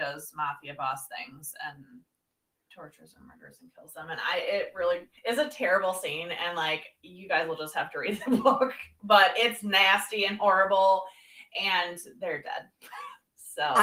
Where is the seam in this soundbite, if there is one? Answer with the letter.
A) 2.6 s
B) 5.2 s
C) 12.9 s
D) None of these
B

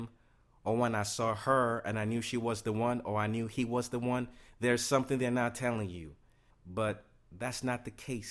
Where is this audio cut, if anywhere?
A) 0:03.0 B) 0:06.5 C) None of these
B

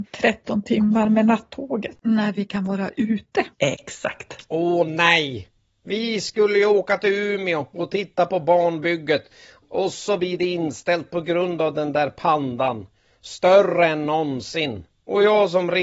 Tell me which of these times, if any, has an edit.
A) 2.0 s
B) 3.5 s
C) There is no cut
A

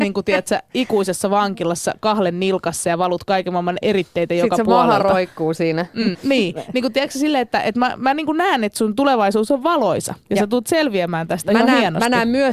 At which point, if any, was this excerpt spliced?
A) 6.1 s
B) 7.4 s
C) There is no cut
A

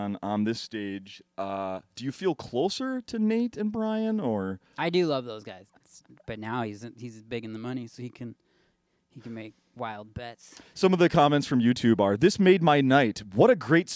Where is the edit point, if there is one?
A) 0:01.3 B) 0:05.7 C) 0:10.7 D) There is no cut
B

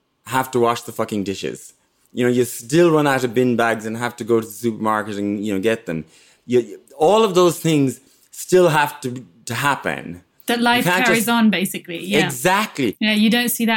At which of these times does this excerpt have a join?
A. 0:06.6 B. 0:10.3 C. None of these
C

